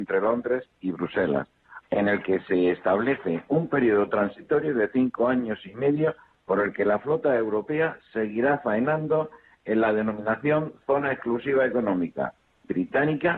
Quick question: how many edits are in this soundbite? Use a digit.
1